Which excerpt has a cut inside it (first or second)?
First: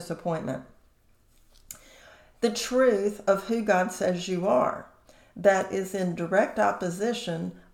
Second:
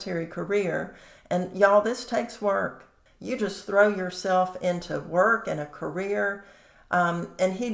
second